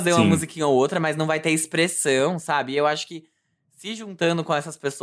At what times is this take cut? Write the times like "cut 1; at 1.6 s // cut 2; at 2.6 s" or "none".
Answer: none